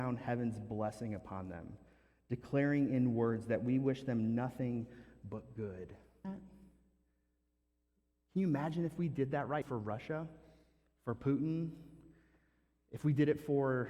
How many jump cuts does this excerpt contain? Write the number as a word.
two